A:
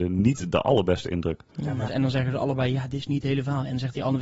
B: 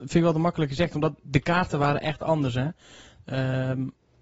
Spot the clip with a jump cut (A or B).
A